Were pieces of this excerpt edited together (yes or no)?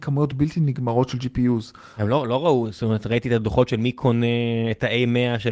no